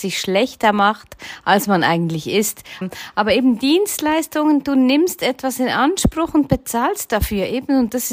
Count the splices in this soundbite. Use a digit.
1